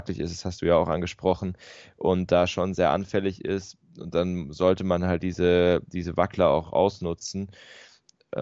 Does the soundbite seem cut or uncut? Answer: uncut